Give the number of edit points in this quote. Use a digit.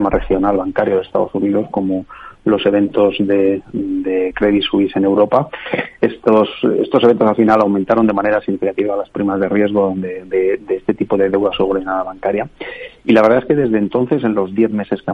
0